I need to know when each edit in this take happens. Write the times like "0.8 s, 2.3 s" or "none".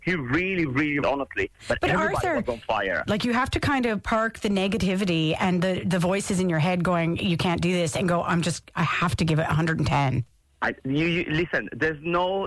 1.0 s, 3.1 s